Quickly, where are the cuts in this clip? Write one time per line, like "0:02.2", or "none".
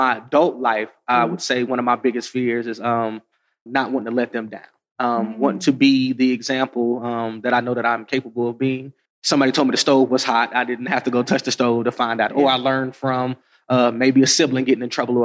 0:03.7
0:09.1
0:12.3